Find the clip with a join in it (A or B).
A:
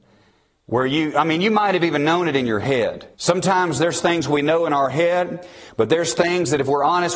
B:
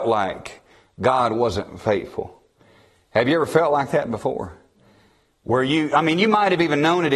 A